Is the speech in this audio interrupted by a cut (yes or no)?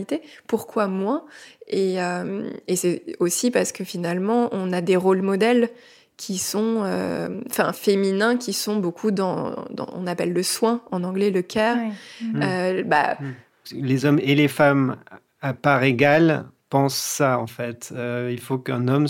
yes